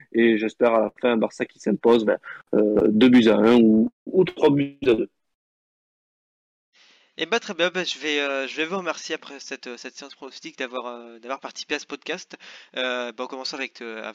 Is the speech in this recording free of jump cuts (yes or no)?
no